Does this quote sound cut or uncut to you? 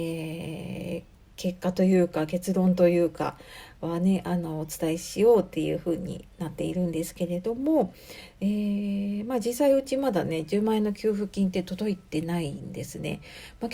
uncut